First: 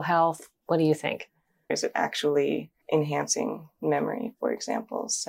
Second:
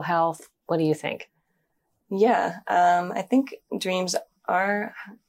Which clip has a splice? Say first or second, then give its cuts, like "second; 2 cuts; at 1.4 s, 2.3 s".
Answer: first; 2 cuts; at 1.7 s, 2.8 s